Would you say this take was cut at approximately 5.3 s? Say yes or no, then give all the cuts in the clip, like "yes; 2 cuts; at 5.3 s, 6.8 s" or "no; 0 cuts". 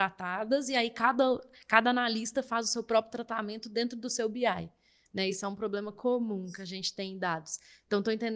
no; 0 cuts